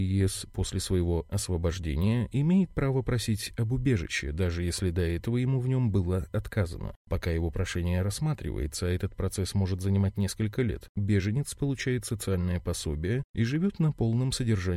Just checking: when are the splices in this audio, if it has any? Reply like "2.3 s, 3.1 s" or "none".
none